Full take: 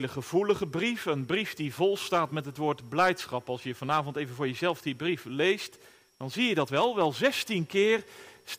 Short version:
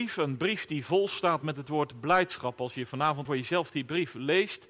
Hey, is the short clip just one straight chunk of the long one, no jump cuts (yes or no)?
no